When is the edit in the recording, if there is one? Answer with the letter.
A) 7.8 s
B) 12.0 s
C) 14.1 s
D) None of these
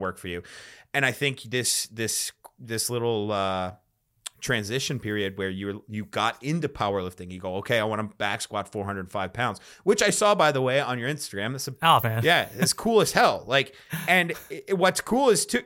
B